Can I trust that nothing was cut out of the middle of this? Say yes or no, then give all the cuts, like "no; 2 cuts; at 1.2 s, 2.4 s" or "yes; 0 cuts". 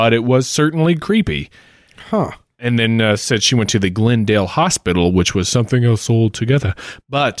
yes; 0 cuts